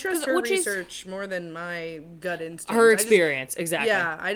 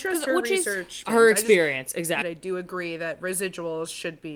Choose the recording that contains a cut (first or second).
second